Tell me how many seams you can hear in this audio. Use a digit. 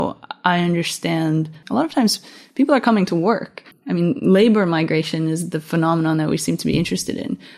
1